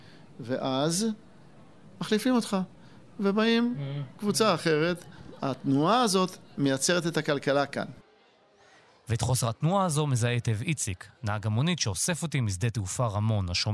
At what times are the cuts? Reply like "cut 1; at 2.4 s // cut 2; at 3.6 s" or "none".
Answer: none